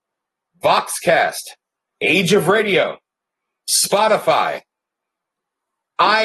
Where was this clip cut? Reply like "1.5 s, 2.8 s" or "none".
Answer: 1.9 s